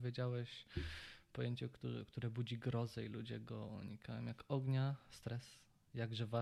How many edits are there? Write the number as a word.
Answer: zero